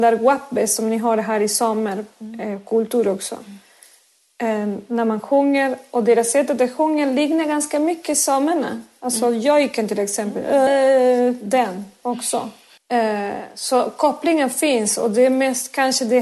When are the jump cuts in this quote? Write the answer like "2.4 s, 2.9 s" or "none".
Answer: 10.7 s, 12.8 s